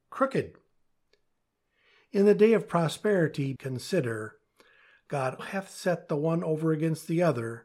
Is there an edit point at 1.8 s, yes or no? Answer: no